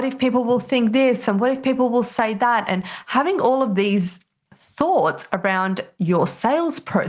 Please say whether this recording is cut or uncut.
uncut